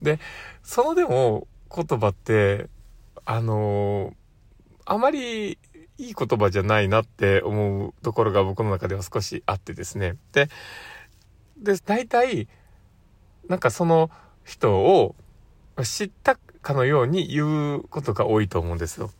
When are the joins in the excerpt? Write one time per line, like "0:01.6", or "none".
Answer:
0:11.8